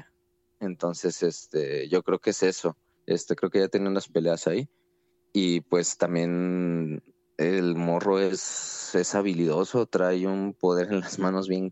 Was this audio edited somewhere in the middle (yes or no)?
yes